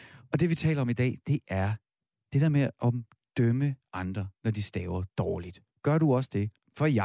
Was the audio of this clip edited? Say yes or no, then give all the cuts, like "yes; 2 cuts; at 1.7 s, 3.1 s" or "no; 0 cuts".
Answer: no; 0 cuts